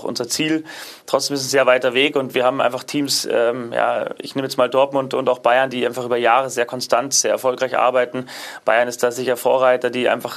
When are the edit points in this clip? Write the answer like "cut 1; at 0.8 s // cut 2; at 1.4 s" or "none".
none